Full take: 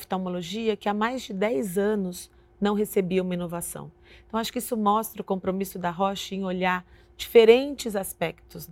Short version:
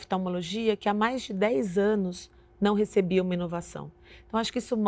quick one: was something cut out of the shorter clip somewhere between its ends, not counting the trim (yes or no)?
no